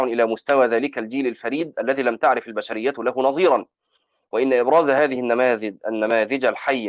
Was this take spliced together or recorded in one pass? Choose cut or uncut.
uncut